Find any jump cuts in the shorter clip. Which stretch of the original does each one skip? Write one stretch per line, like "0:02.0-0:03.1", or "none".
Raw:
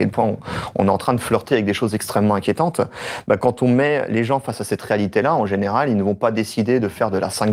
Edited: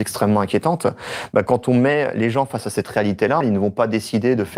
0:05.3-0:05.8